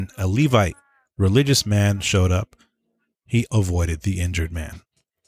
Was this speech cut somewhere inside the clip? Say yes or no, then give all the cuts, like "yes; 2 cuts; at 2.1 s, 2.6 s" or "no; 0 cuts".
yes; 1 cut; at 3.5 s